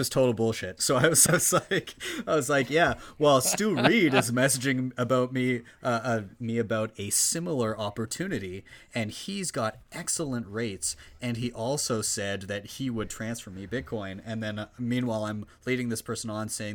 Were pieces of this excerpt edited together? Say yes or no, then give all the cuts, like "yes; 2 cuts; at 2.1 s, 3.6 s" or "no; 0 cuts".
yes; 1 cut; at 1.3 s